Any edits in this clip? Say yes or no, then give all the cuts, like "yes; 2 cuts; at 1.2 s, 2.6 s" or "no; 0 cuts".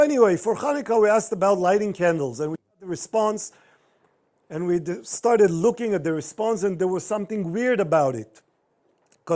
no; 0 cuts